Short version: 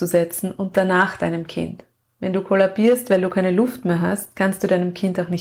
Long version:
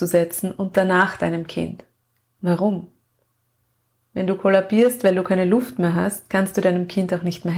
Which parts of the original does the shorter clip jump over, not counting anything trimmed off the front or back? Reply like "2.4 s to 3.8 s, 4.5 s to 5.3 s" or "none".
2.0 s to 4.0 s